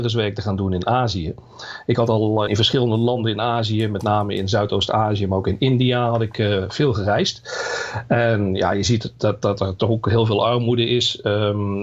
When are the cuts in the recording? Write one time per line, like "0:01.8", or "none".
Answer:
0:02.5